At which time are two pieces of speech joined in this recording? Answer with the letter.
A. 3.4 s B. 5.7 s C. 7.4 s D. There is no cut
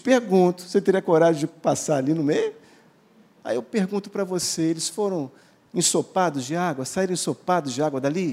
A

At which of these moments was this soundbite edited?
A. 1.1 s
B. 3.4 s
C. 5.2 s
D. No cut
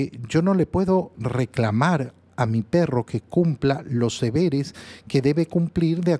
A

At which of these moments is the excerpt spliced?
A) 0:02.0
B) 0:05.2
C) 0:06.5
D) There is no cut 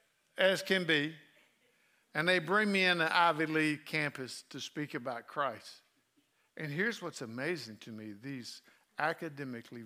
A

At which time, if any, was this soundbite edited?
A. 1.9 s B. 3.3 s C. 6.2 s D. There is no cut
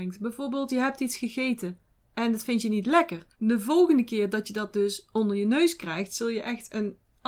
B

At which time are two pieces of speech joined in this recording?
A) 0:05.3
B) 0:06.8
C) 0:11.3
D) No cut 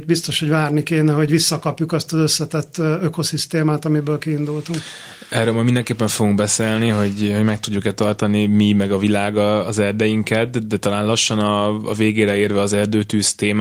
D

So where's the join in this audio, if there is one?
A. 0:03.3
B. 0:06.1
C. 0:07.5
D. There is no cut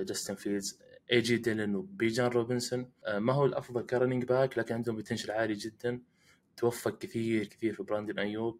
C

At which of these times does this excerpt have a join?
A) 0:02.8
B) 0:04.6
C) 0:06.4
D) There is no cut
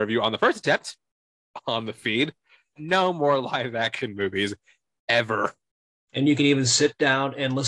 A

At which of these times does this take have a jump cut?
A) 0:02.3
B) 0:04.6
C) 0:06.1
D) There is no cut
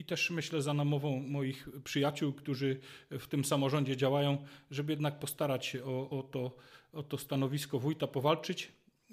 C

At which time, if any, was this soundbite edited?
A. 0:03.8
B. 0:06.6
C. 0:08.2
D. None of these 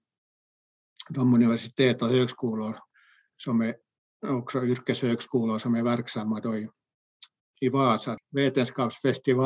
C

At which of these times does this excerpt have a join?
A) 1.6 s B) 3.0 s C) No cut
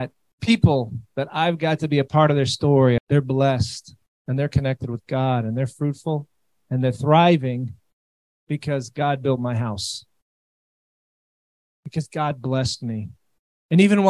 B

